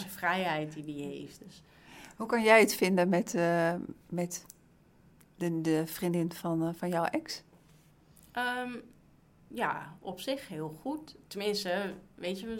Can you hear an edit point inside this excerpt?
no; 0 cuts

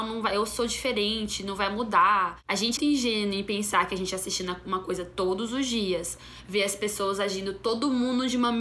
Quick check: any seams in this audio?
yes; 1 cut; at 2.8 s

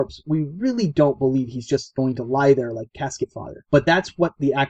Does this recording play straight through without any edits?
yes; 0 cuts

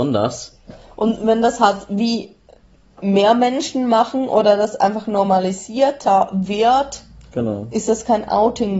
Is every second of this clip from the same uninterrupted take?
yes; 0 cuts

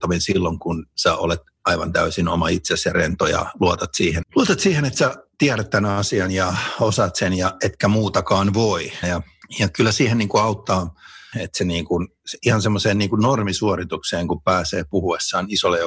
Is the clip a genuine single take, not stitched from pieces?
no; 3 cuts; at 4.2 s, 9.0 s, 11.3 s

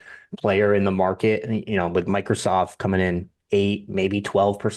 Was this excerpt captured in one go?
yes; 0 cuts

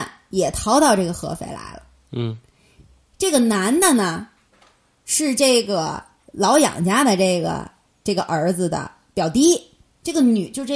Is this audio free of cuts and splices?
yes; 0 cuts

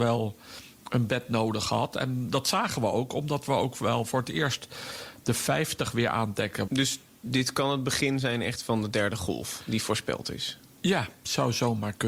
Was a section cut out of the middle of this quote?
yes; 1 cut; at 6.7 s

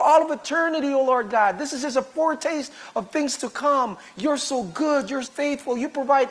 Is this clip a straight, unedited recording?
no; 1 cut; at 5.2 s

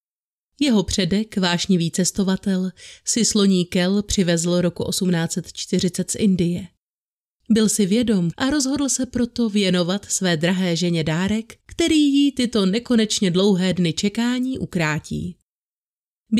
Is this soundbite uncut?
no; 2 cuts; at 8.3 s, 11.6 s

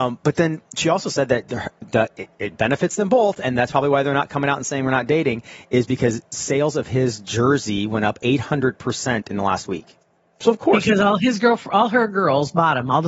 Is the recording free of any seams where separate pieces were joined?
yes; 0 cuts

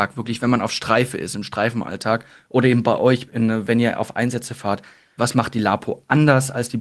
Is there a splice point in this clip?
yes; 1 cut; at 5.2 s

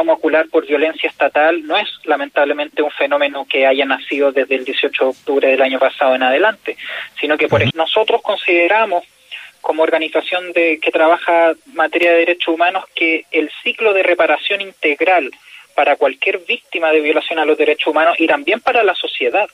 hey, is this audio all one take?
no; 1 cut; at 7.7 s

